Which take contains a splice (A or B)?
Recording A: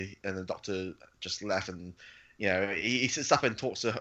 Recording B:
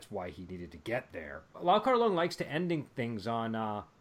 B